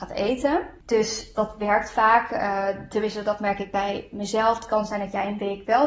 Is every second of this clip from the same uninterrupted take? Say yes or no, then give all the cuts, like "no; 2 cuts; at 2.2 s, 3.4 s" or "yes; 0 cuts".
no; 1 cut; at 1.4 s